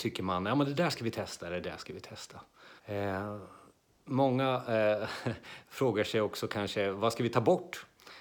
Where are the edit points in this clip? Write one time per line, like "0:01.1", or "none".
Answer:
0:02.8